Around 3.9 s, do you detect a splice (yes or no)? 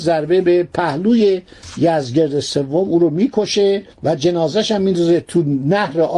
yes